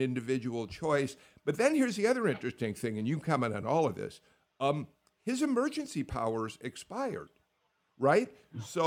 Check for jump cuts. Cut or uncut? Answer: uncut